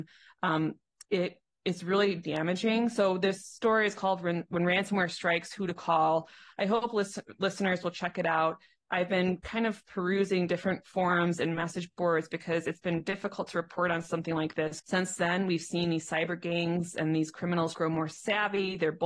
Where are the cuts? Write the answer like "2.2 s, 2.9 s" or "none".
14.8 s, 17.7 s